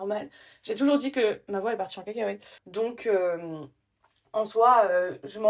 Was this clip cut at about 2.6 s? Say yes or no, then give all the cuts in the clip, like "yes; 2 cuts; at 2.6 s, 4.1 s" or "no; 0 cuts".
yes; 1 cut; at 2.6 s